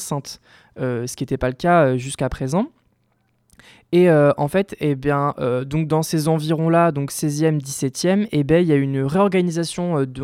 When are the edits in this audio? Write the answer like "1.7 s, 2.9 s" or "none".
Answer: none